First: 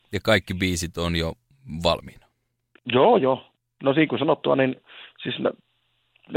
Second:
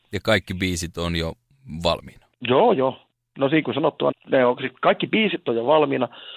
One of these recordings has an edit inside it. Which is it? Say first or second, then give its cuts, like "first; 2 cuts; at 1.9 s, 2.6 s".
second; 2 cuts; at 2.3 s, 4.1 s